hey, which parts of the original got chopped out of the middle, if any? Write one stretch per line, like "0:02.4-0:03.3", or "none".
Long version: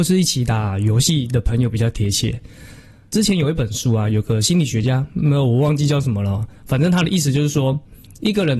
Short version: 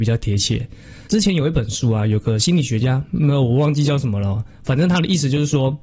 0:02.8-0:03.1

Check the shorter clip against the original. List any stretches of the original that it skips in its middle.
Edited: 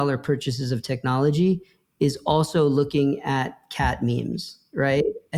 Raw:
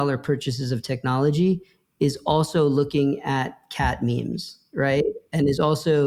none

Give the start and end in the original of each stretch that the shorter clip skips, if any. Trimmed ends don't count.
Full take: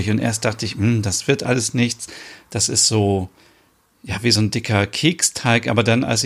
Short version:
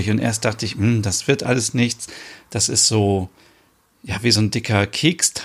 none

